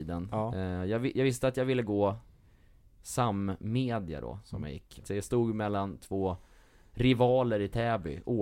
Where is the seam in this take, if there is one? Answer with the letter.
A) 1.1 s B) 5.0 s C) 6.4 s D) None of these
B